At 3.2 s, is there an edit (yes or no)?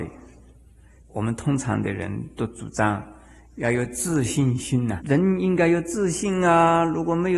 no